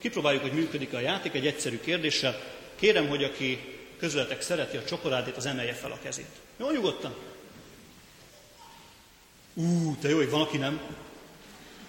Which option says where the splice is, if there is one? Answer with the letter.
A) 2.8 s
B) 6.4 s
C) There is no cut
C